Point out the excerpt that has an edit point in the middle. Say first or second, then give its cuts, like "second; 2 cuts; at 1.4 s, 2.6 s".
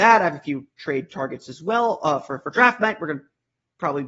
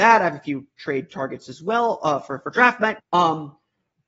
second; 1 cut; at 3.0 s